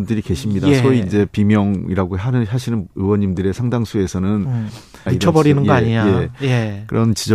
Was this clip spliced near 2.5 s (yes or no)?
no